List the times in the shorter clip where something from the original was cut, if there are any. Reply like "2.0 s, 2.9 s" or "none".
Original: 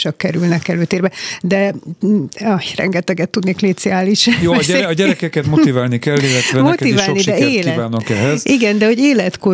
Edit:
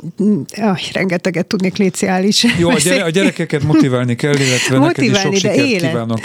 none